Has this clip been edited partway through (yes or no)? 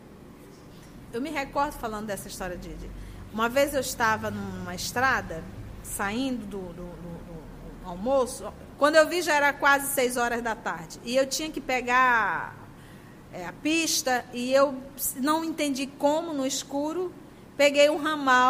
yes